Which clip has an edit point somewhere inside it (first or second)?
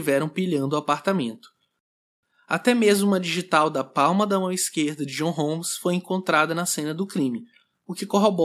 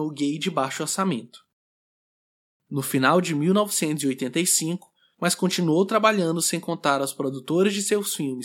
second